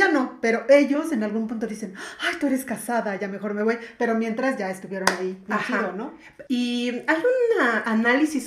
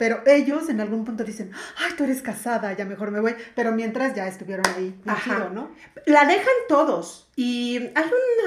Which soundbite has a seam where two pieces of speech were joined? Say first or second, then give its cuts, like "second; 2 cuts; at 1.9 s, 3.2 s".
first; 1 cut; at 6.5 s